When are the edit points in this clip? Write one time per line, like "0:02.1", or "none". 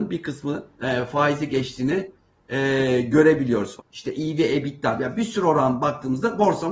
0:03.8